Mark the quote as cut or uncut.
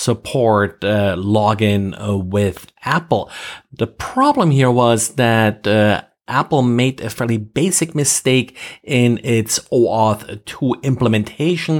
uncut